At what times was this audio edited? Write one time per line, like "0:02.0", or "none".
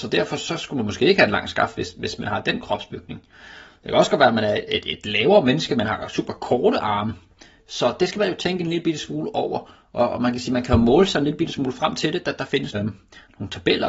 0:07.6
0:12.7